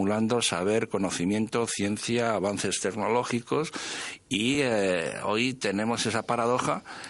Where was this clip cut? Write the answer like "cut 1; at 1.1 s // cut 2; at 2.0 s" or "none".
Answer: none